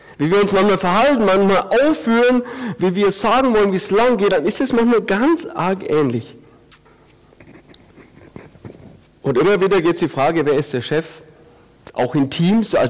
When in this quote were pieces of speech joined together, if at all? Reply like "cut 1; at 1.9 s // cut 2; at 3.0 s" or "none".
none